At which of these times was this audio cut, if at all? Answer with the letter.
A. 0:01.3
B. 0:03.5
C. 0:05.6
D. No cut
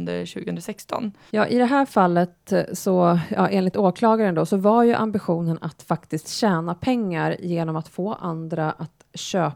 A